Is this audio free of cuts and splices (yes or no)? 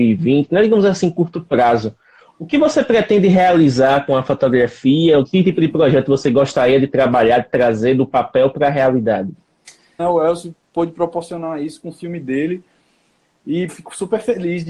no